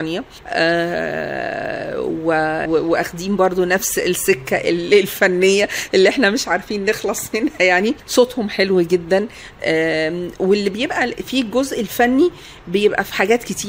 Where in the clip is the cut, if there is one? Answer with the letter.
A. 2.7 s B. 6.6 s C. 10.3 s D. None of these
A